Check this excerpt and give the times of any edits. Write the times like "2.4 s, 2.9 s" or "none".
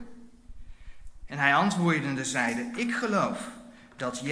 1.3 s